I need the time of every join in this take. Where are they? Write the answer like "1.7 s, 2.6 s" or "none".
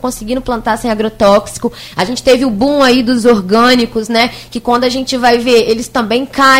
none